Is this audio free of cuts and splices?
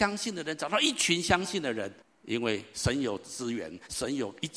no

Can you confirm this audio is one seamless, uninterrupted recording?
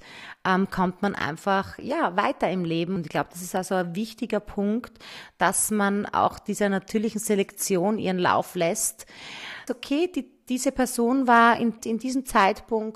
no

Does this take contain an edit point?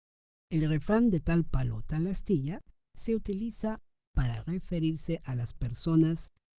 no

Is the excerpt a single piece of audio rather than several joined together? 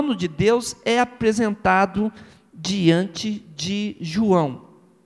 yes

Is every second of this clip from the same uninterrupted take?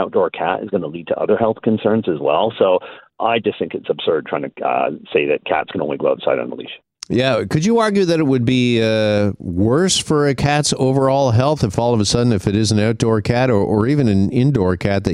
yes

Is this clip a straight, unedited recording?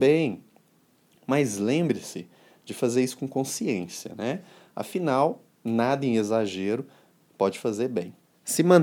yes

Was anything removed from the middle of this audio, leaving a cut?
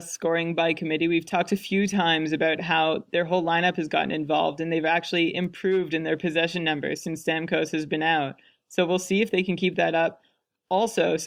no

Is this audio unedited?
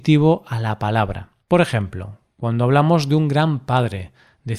no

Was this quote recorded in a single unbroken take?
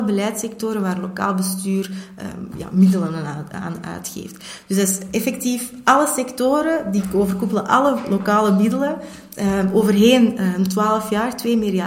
yes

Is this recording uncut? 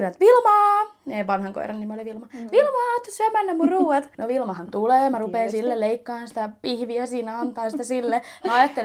no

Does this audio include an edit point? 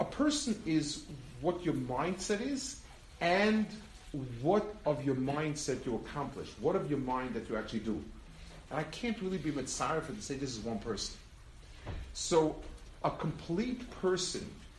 yes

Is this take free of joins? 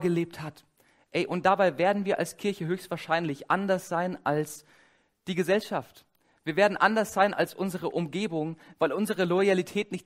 no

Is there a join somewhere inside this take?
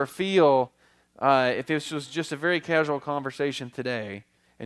no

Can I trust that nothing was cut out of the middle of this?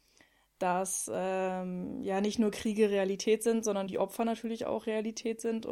no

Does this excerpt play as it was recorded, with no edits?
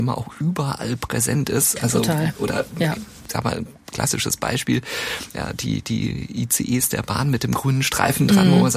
yes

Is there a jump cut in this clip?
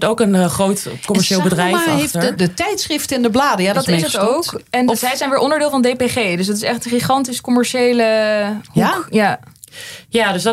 yes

